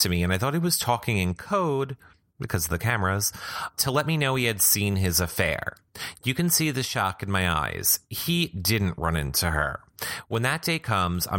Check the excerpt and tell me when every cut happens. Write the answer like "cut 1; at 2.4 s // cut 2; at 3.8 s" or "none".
cut 1; at 3.7 s